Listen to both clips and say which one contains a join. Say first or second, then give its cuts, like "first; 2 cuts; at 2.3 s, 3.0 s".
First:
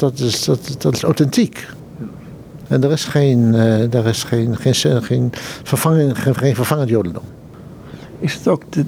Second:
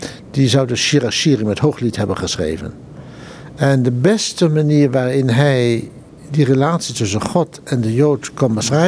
first; 1 cut; at 6.3 s